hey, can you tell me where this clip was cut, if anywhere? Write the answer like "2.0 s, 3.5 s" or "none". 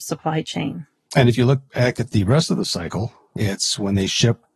1.1 s